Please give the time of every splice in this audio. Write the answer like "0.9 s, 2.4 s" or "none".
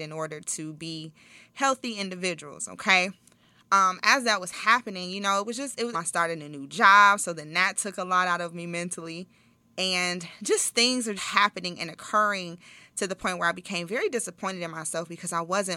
5.9 s, 11.2 s